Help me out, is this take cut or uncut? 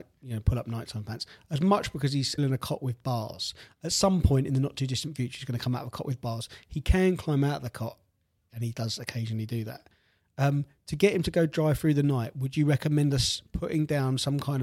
cut